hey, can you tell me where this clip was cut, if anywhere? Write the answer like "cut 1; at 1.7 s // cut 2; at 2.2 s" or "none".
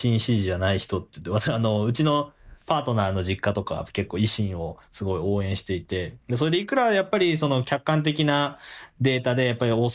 none